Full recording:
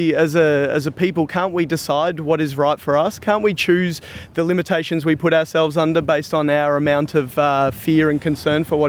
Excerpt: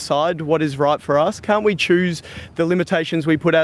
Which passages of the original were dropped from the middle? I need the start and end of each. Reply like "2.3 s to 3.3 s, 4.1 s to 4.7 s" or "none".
none